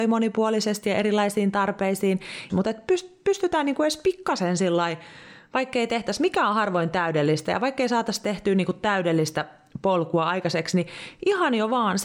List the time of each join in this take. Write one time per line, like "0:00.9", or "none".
0:02.5